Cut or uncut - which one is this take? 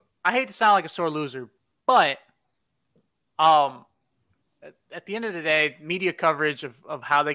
uncut